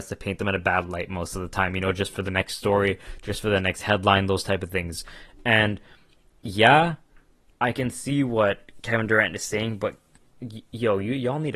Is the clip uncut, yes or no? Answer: yes